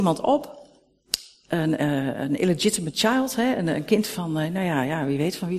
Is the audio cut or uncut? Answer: cut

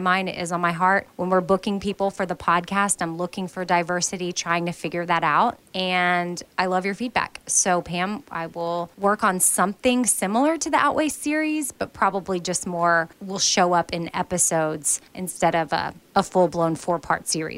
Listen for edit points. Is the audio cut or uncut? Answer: uncut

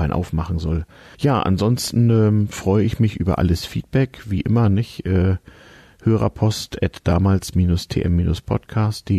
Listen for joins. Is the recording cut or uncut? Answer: cut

